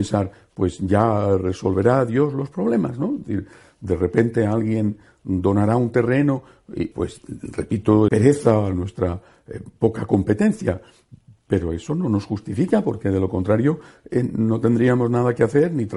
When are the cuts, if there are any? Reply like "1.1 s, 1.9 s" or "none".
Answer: 6.9 s, 8.1 s